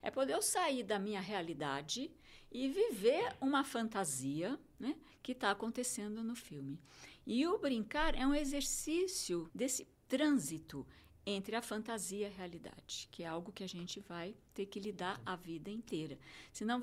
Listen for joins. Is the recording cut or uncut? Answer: cut